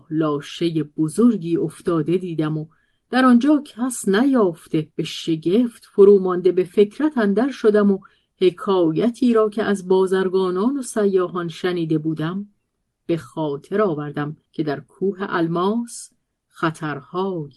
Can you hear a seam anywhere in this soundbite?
yes; 2 cuts; at 4.9 s, 14.5 s

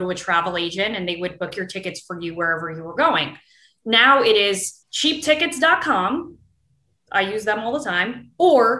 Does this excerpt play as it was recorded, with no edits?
no; 1 cut; at 4.8 s

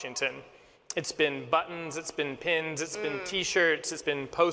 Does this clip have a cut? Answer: no; 0 cuts

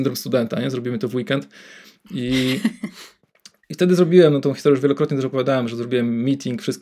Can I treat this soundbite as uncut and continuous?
yes; 0 cuts

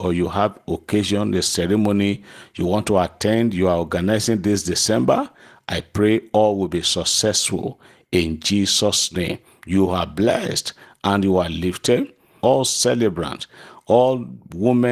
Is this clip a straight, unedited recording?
no; 1 cut; at 12.4 s

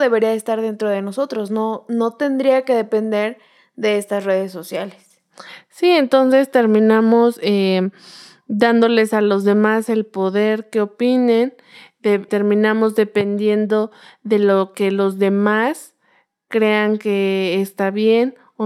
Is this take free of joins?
no; 1 cut; at 12.3 s

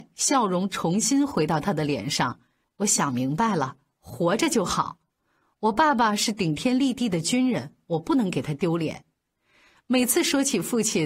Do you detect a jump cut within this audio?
no; 0 cuts

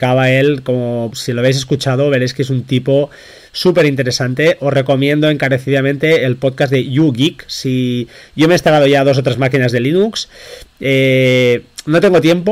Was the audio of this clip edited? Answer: yes; 1 cut; at 1.1 s

